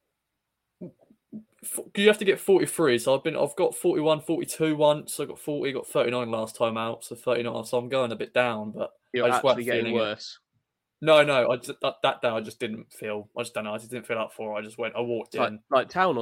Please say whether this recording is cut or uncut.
uncut